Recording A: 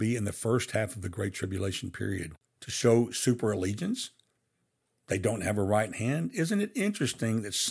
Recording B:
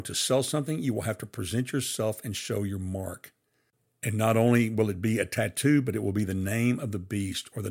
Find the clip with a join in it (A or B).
A